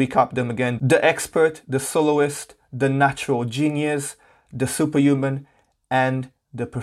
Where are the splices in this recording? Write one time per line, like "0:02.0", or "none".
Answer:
none